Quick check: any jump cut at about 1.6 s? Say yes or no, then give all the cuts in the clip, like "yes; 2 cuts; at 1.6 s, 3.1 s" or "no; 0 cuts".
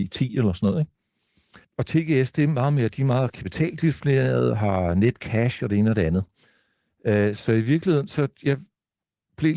yes; 1 cut; at 1.6 s